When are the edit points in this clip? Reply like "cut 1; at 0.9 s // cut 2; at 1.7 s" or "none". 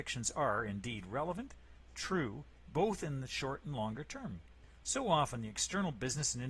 none